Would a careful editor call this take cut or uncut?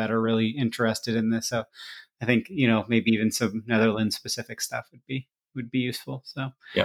uncut